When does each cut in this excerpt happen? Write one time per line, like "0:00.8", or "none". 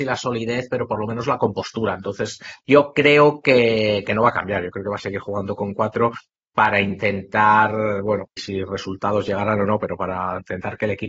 0:08.4